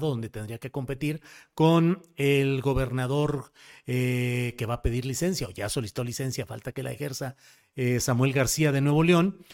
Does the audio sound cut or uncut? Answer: uncut